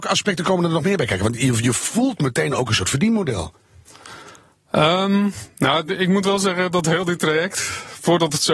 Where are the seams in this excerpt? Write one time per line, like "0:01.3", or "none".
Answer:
none